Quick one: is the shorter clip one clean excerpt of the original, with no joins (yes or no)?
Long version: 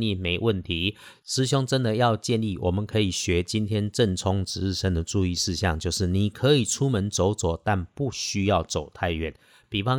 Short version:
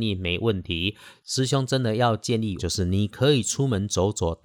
no